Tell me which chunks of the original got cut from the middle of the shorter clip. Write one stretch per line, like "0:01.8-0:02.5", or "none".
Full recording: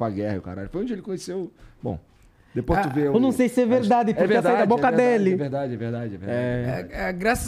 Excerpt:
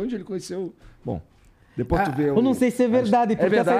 none